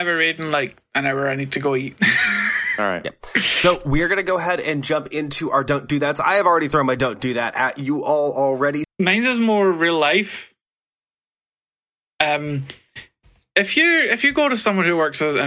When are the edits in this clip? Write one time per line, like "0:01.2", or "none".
0:08.8